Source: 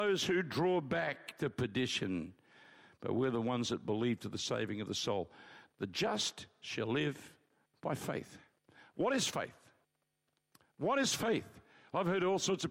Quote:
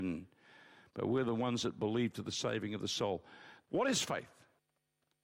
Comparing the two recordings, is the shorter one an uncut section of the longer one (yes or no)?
no